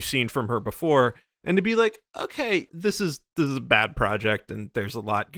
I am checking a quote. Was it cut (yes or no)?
yes